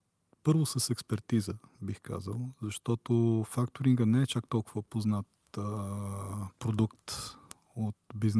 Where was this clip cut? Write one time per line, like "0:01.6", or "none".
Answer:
none